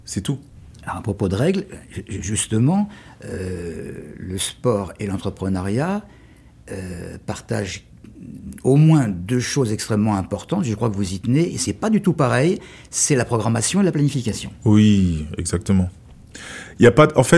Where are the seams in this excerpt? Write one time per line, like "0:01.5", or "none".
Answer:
none